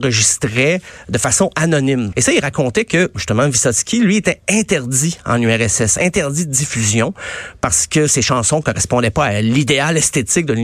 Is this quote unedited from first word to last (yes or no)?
no